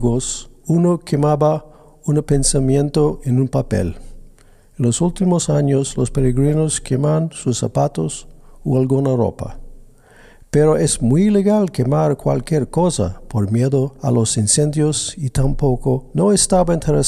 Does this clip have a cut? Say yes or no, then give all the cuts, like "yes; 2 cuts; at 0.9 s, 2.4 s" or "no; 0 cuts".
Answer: no; 0 cuts